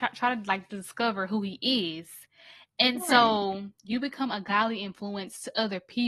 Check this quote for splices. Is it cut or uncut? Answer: uncut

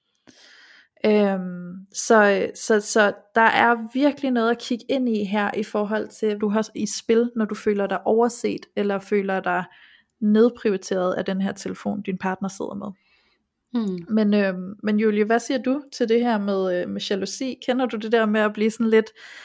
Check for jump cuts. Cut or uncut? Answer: cut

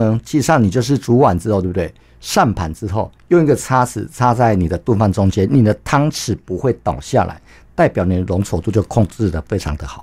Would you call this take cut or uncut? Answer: uncut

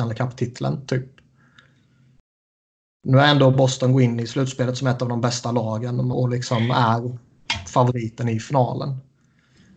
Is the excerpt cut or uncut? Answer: cut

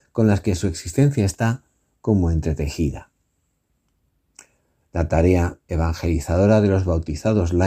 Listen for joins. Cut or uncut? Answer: uncut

